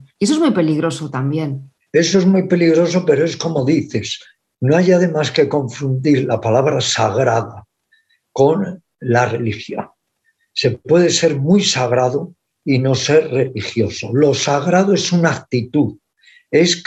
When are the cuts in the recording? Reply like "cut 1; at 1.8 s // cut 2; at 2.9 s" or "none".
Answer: none